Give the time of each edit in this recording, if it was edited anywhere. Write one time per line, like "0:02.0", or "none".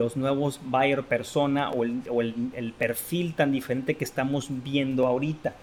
none